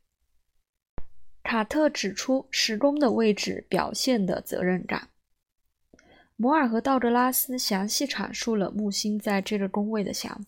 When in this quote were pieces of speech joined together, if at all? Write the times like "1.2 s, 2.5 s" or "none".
none